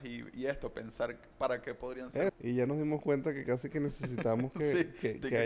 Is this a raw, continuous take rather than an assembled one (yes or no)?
no